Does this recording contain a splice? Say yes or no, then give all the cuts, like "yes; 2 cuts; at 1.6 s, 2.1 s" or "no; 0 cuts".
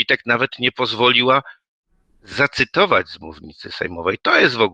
no; 0 cuts